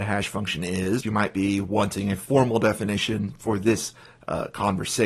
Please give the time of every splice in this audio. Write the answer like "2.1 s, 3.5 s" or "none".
1.0 s